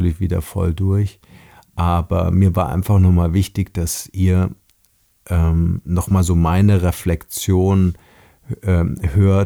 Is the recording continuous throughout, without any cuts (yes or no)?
yes